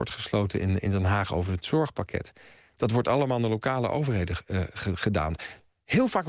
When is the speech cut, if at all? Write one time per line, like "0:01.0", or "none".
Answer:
none

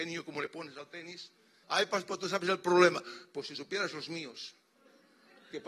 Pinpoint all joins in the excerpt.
0:01.6

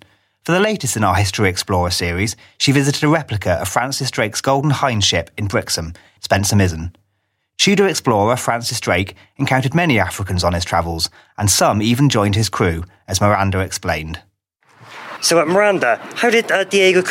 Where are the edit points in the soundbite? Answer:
0:06.2
0:15.2

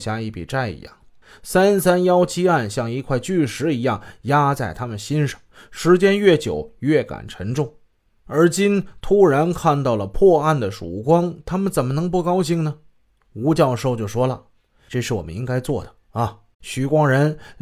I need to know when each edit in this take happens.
0:13.2
0:16.5

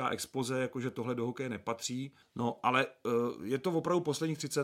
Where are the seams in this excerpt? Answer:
0:02.2

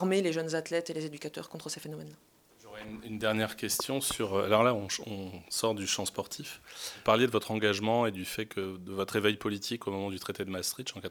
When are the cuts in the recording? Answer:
none

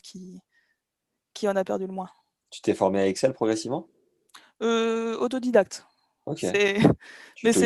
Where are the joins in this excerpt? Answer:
none

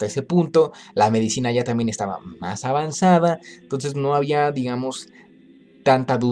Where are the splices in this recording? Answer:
none

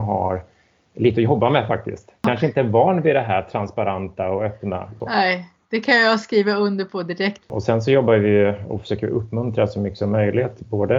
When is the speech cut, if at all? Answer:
0:07.4

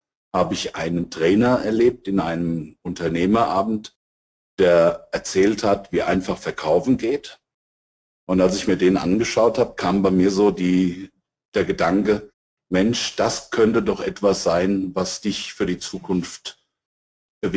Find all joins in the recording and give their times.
none

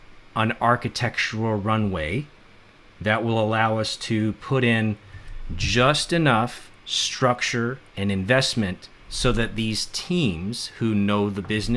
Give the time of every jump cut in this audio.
0:07.9

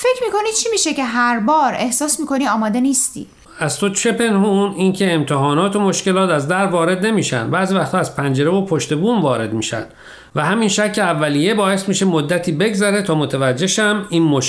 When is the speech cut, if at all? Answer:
none

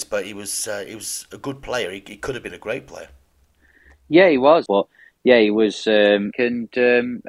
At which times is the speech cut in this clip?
0:04.7
0:06.3

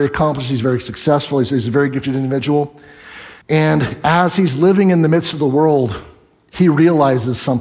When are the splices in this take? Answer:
0:03.4

